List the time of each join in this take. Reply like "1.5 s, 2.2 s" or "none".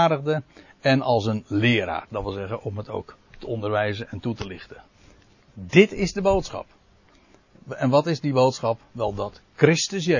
none